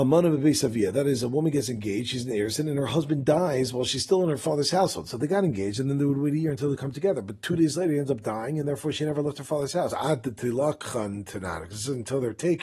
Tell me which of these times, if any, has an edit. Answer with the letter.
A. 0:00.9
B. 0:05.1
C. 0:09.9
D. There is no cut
C